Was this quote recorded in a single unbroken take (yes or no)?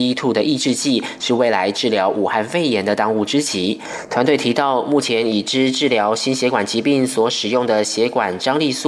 no